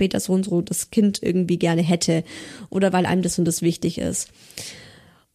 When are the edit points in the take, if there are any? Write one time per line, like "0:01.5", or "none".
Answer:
none